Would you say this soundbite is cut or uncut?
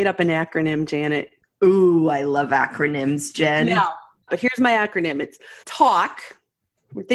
cut